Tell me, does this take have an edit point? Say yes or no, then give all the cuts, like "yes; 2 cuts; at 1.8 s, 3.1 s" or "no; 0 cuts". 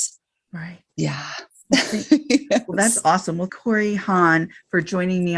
yes; 1 cut; at 3.5 s